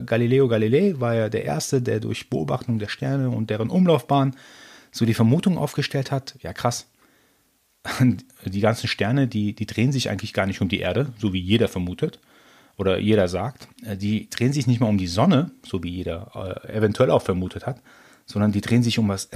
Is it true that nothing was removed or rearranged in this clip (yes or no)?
yes